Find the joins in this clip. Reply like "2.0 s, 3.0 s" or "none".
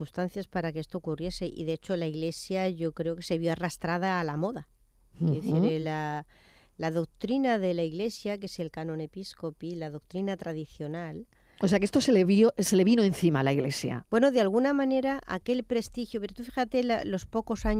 none